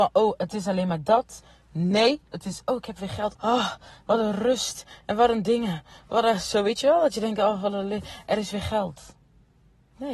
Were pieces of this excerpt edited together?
yes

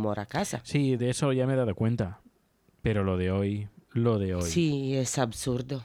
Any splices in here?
yes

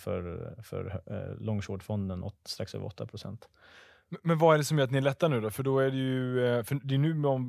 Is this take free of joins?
yes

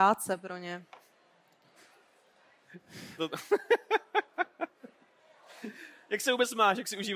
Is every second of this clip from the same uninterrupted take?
no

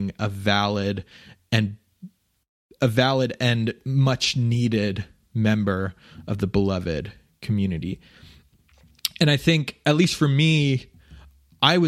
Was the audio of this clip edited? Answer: no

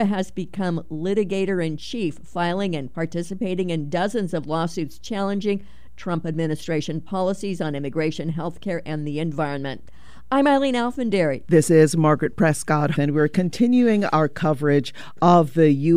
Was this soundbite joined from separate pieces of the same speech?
yes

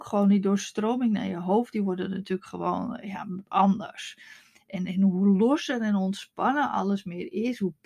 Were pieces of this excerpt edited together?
no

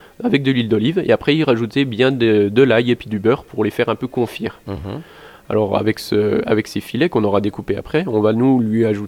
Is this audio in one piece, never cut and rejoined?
yes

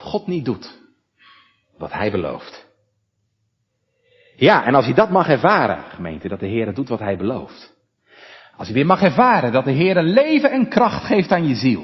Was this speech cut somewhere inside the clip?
no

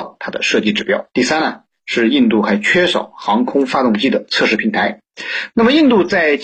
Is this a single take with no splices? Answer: no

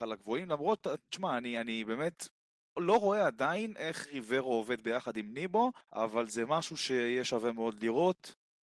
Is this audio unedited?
no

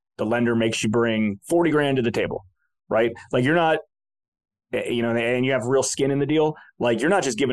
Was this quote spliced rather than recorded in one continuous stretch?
no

